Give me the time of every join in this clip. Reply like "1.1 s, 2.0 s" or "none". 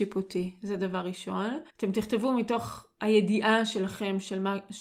1.7 s